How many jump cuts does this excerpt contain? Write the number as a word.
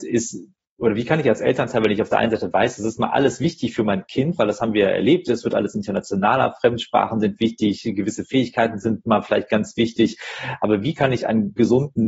zero